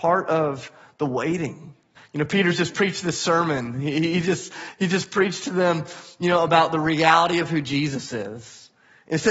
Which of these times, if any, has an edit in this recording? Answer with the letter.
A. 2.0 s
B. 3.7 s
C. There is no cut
A